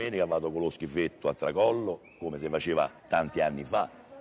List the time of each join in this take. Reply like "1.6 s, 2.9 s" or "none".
3.0 s